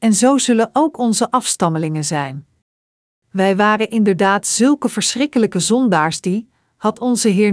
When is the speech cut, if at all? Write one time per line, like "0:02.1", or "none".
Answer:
0:03.2